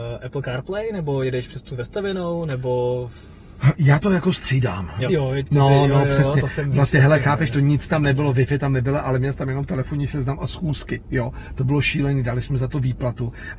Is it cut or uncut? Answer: cut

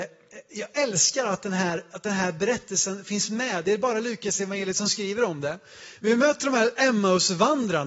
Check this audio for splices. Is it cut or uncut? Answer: uncut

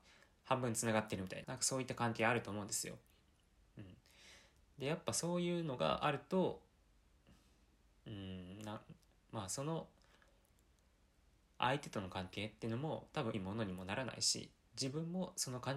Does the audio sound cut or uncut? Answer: cut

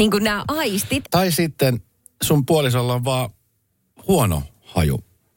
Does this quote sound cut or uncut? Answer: cut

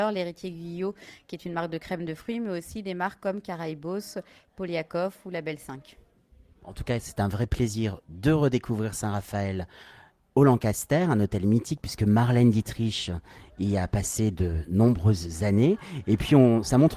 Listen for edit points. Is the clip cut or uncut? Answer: uncut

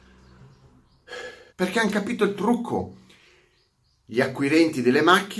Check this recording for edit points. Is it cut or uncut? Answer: cut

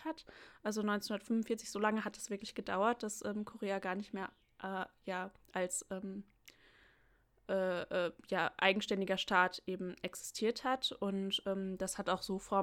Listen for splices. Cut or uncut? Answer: uncut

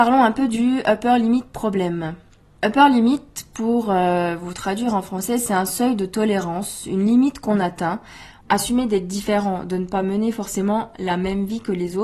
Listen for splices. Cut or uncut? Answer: cut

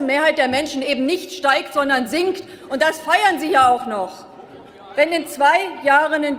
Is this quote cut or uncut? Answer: uncut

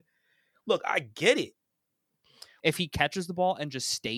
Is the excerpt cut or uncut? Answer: cut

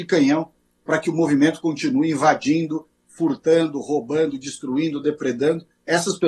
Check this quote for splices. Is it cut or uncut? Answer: uncut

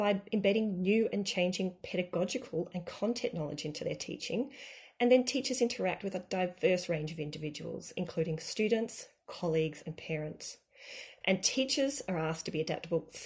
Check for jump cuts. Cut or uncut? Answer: cut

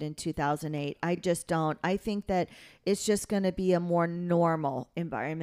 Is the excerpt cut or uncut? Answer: uncut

